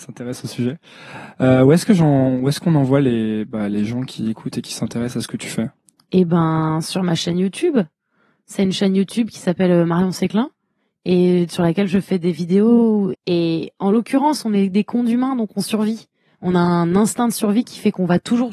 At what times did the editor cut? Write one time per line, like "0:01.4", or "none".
0:13.1